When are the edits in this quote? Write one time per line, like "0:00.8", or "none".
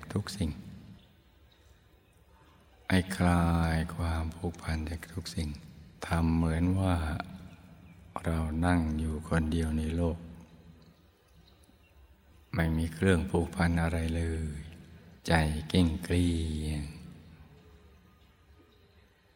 0:06.0
0:15.2